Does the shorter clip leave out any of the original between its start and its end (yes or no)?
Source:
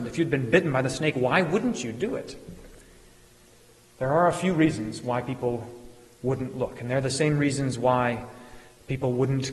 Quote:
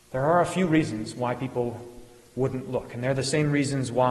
no